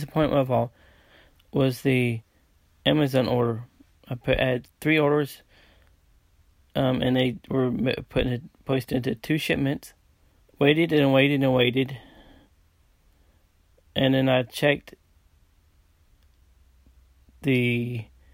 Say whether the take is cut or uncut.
cut